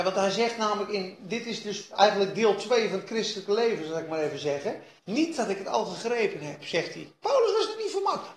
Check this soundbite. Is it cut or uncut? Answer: cut